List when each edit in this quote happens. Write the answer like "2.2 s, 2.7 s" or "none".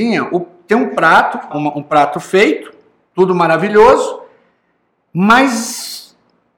1.5 s